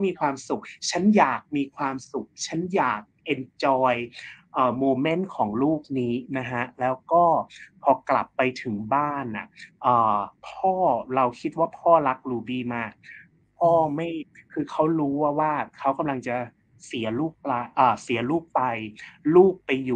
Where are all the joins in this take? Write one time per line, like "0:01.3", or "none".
0:10.4